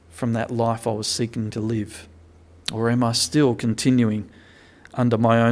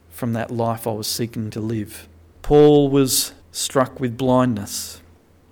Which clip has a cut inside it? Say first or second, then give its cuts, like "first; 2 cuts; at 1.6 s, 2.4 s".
second; 2 cuts; at 2.3 s, 3.4 s